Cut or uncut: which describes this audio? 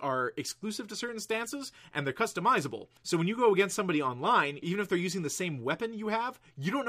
cut